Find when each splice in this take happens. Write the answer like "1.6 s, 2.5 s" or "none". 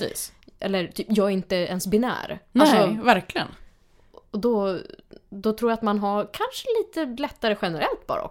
none